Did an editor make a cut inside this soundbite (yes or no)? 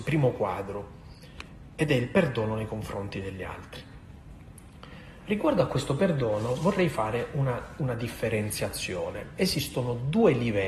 no